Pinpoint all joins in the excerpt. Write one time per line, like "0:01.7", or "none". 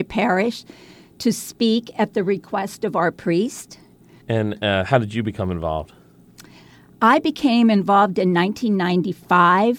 0:04.2